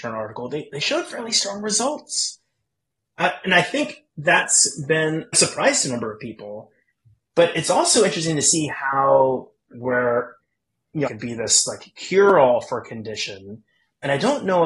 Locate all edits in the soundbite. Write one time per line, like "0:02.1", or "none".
0:05.3
0:09.7
0:11.1